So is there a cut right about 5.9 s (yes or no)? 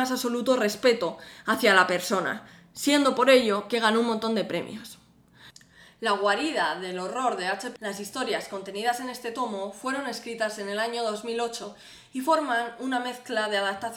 no